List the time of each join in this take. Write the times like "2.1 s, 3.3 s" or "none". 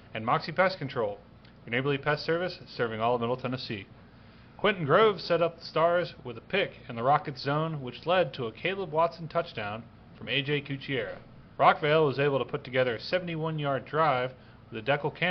11.6 s